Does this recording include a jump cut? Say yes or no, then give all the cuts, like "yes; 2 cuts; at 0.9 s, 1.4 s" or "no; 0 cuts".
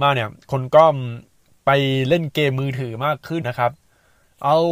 yes; 1 cut; at 3.4 s